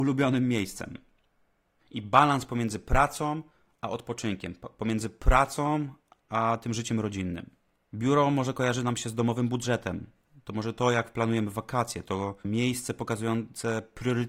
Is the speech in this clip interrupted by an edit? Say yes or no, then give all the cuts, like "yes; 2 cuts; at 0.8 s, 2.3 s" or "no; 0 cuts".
yes; 2 cuts; at 1.8 s, 12.4 s